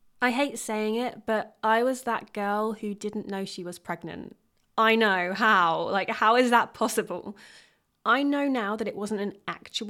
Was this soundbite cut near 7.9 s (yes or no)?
yes